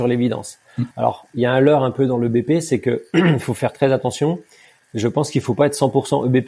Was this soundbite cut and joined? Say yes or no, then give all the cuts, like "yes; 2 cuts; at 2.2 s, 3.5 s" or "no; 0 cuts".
no; 0 cuts